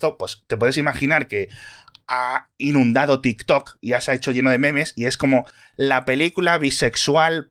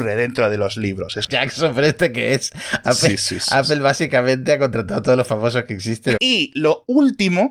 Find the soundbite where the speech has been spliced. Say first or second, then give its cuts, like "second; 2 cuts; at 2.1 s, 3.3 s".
second; 2 cuts; at 1.3 s, 6.1 s